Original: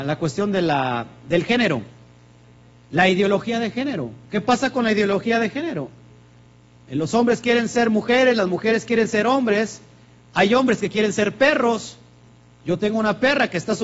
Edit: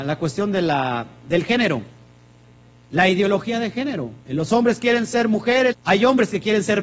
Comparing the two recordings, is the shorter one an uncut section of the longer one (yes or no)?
no